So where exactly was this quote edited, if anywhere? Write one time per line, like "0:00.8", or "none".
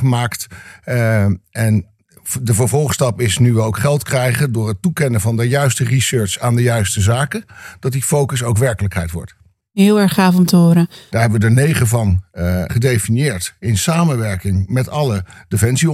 0:11.1
0:12.7